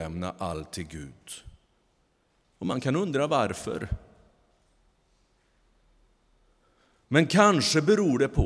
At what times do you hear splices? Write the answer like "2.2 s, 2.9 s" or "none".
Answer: 2.4 s